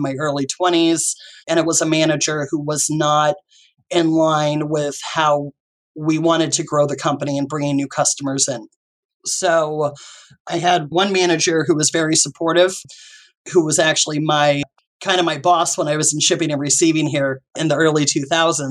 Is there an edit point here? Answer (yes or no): yes